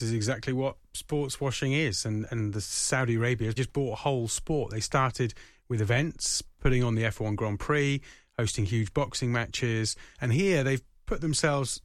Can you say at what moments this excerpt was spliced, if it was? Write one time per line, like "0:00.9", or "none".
0:03.6
0:10.1